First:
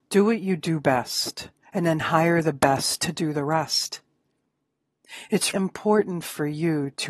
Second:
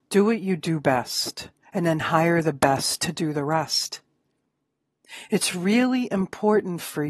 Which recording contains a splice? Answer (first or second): first